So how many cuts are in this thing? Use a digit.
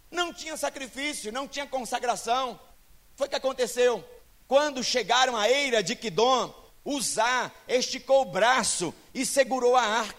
1